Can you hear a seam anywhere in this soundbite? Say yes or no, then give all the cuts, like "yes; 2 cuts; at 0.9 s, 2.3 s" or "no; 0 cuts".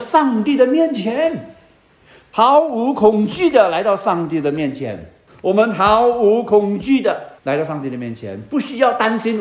yes; 2 cuts; at 5.3 s, 7.4 s